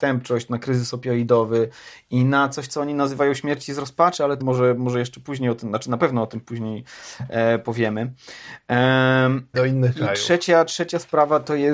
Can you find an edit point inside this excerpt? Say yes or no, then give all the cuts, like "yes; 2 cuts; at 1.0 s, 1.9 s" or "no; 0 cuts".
yes; 2 cuts; at 4.4 s, 9.5 s